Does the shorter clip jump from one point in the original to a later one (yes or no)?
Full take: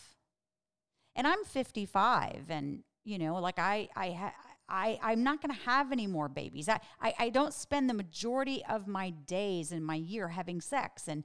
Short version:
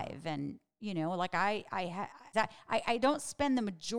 yes